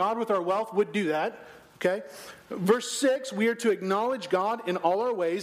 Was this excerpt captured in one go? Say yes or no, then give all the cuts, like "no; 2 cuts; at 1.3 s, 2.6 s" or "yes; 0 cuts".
yes; 0 cuts